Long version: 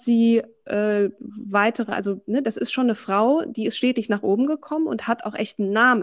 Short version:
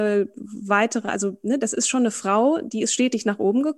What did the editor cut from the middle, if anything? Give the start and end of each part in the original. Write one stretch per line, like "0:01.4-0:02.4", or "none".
none